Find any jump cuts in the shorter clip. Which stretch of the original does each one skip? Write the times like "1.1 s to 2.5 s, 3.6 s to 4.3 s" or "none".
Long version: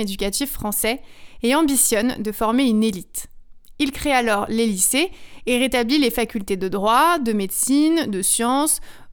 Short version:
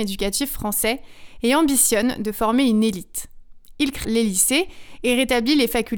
4.0 s to 4.5 s